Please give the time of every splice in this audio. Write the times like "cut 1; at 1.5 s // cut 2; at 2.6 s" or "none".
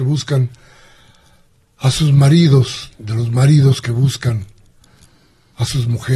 none